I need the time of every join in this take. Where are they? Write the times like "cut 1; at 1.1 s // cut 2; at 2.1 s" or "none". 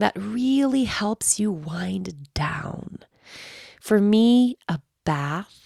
none